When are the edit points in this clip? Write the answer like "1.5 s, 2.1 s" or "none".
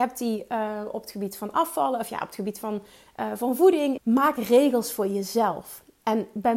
4.0 s

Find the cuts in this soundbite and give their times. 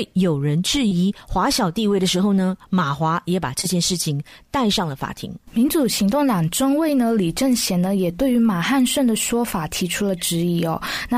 5.4 s

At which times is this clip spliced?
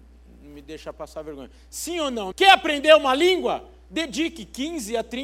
2.3 s

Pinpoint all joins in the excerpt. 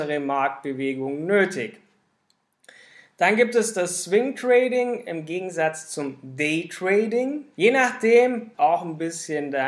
7.5 s, 8.5 s

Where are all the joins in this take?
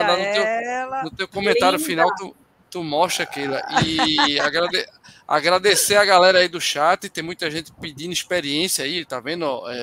none

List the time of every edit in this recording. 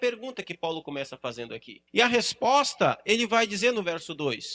1.9 s

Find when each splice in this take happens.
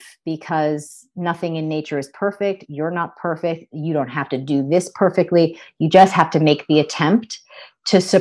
none

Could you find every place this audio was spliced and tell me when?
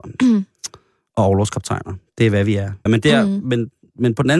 2.9 s

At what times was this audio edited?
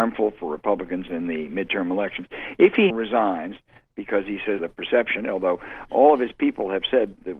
2.9 s, 4.6 s

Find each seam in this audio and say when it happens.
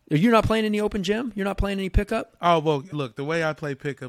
2.9 s

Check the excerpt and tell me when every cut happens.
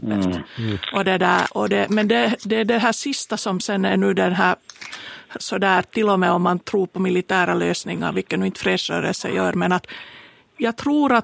1.5 s, 5.4 s

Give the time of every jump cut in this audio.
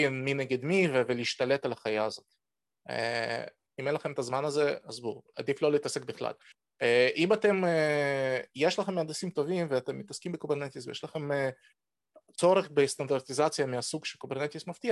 5.3 s

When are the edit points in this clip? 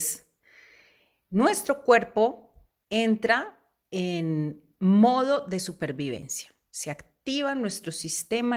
none

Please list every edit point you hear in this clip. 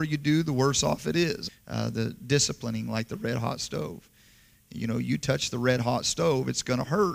1.5 s

